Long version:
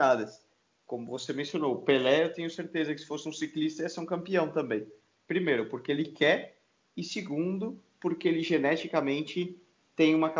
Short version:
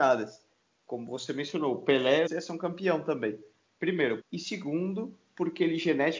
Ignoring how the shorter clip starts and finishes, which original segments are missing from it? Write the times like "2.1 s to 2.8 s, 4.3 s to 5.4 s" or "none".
2.3 s to 3.7 s, 5.7 s to 6.9 s